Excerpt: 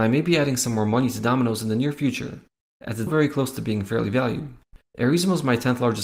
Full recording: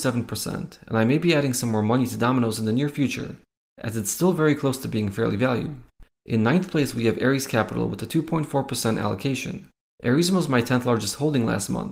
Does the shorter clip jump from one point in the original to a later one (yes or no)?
yes